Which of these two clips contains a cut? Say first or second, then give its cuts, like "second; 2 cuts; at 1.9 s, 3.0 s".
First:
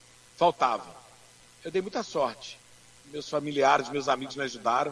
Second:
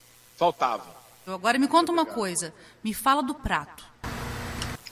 second; 1 cut; at 1.3 s